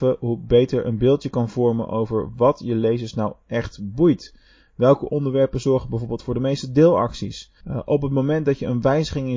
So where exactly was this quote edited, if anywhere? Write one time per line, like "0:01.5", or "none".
0:07.6